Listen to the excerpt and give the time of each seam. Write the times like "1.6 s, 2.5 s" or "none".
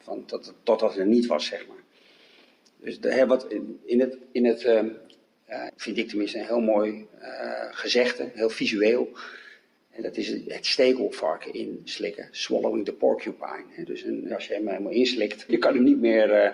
5.7 s, 14.3 s, 15.5 s